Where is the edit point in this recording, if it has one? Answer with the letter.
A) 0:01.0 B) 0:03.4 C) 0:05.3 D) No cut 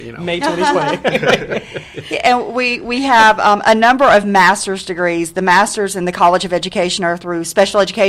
D